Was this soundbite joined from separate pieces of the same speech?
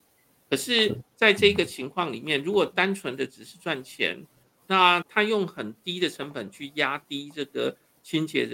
yes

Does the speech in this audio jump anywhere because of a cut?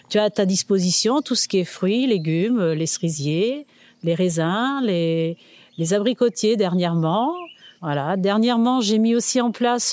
yes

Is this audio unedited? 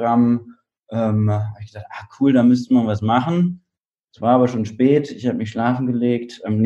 yes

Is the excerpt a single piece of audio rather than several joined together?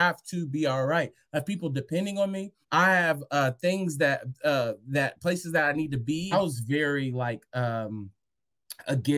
no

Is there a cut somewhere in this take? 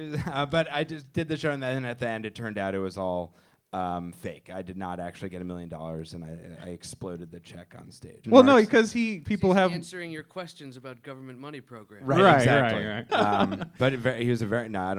yes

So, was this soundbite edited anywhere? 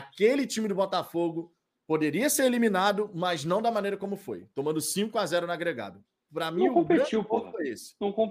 no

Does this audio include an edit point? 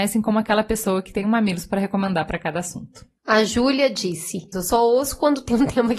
yes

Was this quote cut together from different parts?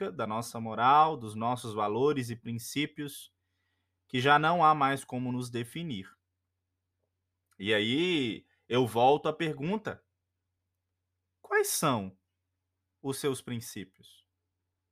no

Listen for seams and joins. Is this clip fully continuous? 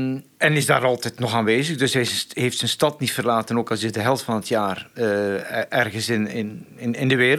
yes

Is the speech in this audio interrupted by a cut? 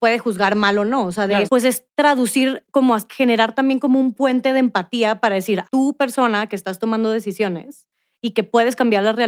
yes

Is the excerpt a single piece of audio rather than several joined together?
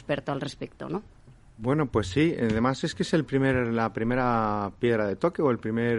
yes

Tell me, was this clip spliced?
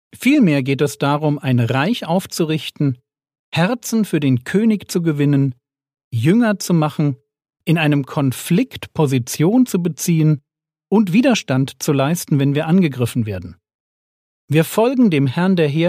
no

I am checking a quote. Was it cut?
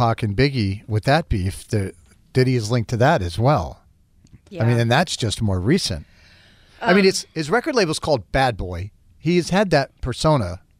no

